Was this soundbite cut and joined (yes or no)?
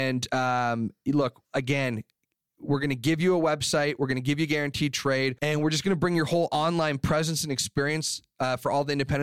yes